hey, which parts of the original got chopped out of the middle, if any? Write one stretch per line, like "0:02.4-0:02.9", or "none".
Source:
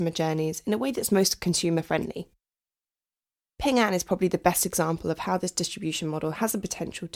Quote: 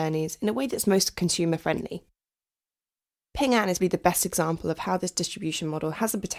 0:04.0-0:04.2